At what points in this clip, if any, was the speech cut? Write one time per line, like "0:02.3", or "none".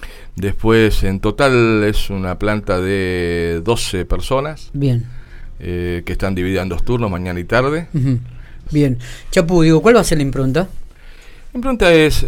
0:08.7